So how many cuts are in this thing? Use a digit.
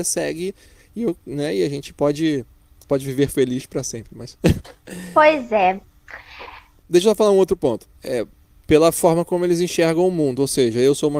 3